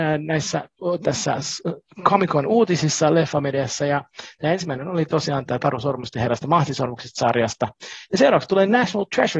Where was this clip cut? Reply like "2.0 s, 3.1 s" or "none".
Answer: none